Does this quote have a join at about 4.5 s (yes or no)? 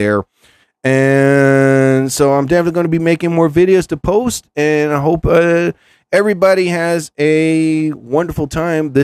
no